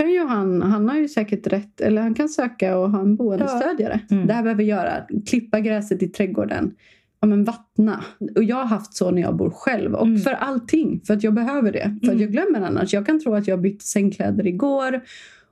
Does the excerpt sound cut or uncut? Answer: cut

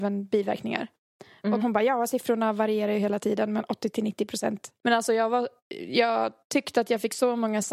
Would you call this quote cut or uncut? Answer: cut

